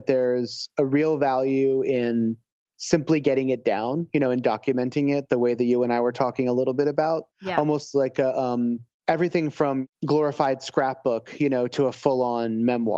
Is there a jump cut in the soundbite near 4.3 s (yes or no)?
no